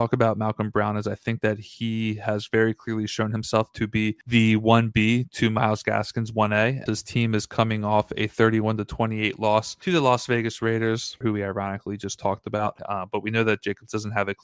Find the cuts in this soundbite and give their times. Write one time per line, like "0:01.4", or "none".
0:06.9
0:11.2
0:12.8